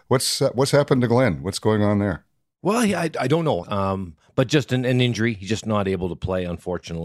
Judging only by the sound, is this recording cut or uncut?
cut